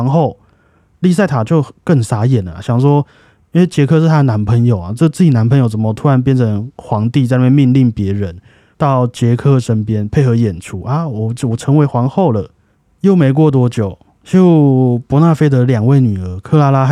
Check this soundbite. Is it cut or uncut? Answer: cut